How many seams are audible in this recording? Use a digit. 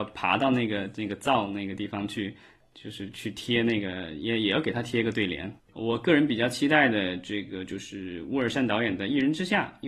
1